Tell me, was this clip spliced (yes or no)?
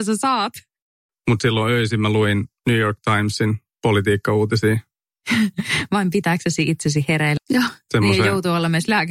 yes